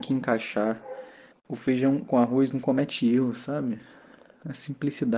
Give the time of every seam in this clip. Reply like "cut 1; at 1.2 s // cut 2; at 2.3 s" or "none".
cut 1; at 1.3 s

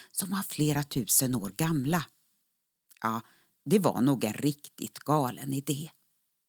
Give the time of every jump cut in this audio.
none

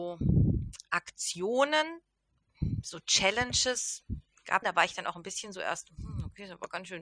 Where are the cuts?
cut 1; at 4.6 s

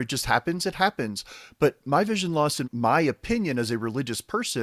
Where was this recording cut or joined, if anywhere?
cut 1; at 2.6 s

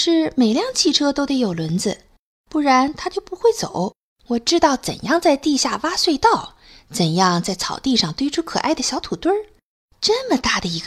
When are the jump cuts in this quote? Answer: cut 1; at 4.1 s // cut 2; at 9.9 s

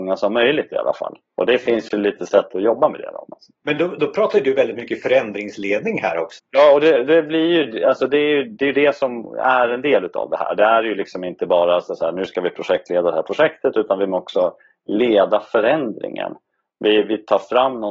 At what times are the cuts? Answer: cut 1; at 6.4 s

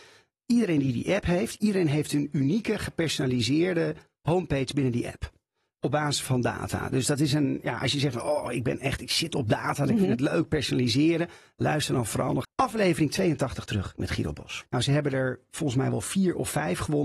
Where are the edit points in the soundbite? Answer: cut 1; at 12.4 s // cut 2; at 14.6 s

